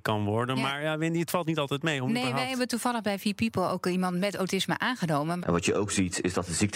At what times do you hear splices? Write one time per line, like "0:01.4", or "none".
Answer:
0:05.4